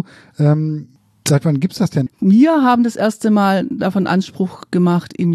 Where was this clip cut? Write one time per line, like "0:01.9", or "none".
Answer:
0:02.1